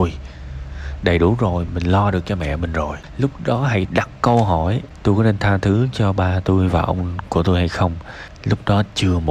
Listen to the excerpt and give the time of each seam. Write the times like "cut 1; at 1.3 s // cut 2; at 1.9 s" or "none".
cut 1; at 1.7 s

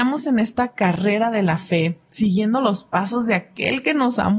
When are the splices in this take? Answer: none

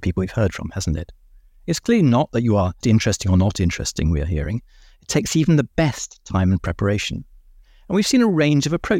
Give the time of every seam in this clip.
cut 1; at 2.8 s

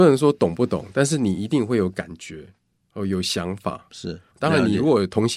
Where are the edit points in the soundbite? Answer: cut 1; at 4.3 s

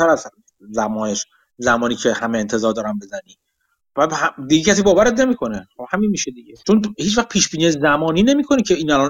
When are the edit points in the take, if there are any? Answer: cut 1; at 6.6 s

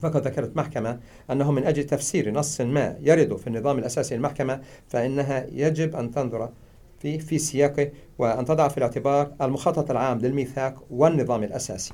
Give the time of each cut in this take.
none

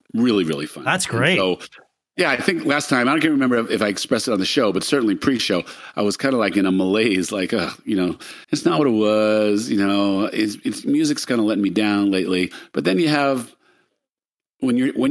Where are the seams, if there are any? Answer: cut 1; at 8.4 s

